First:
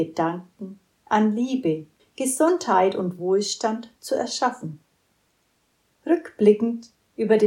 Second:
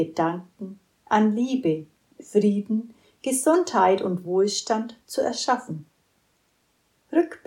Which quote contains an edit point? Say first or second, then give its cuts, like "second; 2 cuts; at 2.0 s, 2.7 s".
first; 1 cut; at 2.0 s